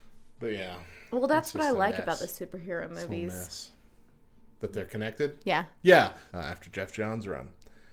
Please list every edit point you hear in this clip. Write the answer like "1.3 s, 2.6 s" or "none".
6.3 s

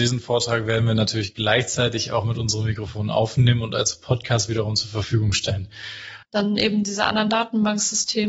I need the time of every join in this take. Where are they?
6.2 s

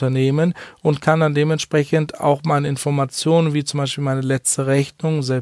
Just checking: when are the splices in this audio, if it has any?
none

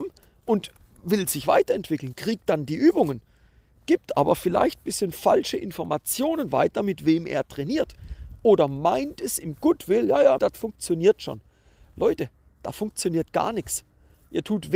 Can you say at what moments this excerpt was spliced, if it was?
10.4 s

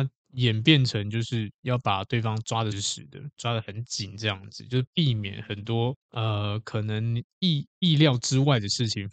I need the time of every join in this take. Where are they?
2.7 s, 6.0 s

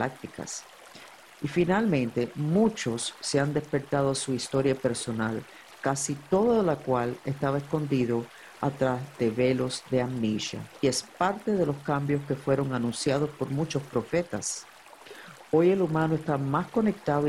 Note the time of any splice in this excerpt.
10.8 s

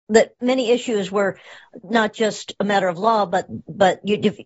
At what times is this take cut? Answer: 1.8 s

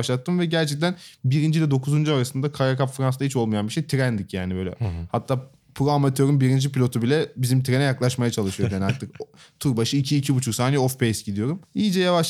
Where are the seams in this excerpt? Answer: none

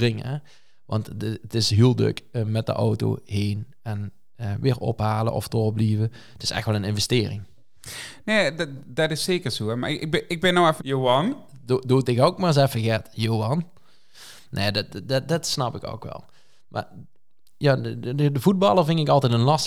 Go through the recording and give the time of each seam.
10.8 s

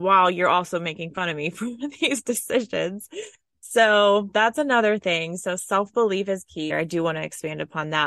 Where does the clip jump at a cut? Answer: 6.7 s

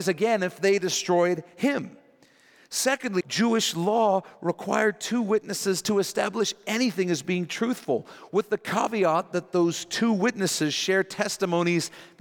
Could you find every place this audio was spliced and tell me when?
3.2 s

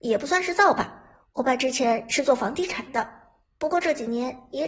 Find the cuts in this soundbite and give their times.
none

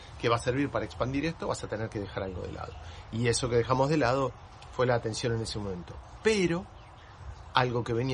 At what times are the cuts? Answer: none

